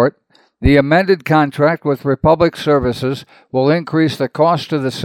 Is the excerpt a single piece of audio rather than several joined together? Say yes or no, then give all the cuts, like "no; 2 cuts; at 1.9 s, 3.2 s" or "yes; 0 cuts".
yes; 0 cuts